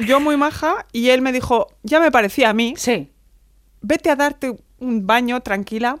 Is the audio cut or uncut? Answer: uncut